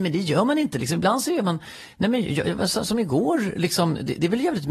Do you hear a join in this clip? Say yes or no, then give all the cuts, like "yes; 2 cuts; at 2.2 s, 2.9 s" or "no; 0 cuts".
no; 0 cuts